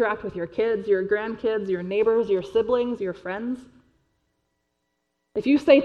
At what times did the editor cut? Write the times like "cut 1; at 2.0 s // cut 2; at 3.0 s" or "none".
cut 1; at 3.0 s